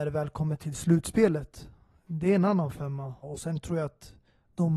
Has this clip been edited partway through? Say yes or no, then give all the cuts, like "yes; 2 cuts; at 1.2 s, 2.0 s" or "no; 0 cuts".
yes; 1 cut; at 3.2 s